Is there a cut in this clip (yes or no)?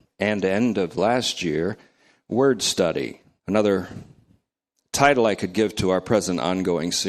yes